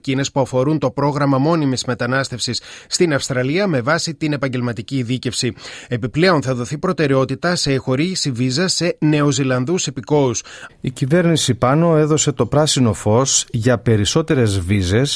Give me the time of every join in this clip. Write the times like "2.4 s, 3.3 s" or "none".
10.7 s